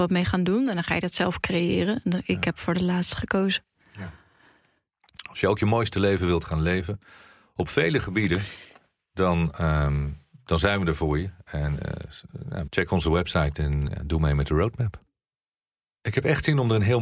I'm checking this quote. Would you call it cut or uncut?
cut